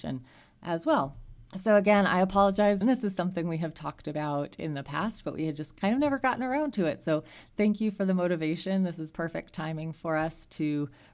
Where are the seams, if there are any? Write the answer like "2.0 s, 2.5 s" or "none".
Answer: 1.5 s, 2.8 s